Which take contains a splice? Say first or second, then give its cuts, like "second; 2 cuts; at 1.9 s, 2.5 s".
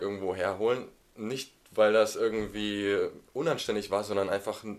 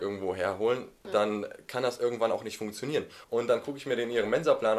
second; 2 cuts; at 1.0 s, 3.2 s